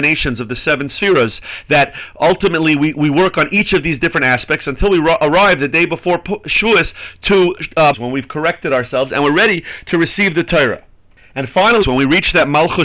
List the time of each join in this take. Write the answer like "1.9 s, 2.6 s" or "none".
7.9 s, 11.8 s